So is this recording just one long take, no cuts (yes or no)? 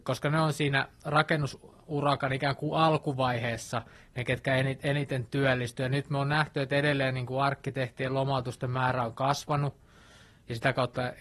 yes